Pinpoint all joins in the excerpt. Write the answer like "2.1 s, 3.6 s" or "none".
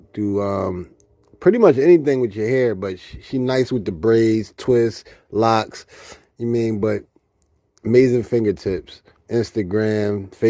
none